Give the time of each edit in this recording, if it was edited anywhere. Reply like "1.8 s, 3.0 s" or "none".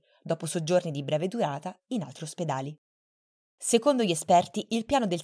3.4 s

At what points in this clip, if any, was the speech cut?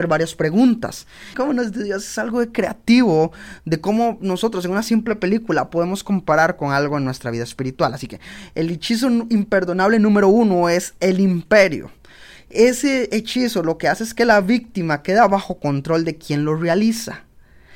1.3 s

